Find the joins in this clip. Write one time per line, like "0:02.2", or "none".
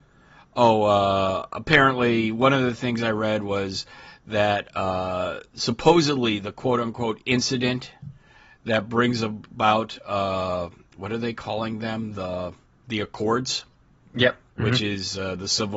none

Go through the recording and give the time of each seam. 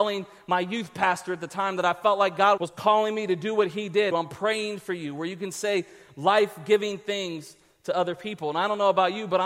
0:02.6
0:04.1

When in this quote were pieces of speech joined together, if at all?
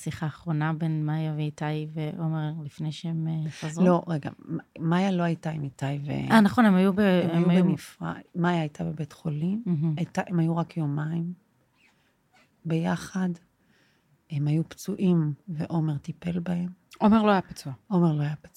none

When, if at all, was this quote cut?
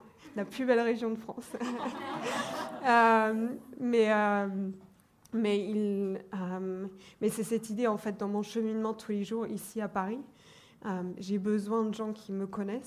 none

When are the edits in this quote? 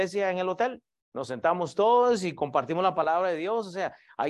none

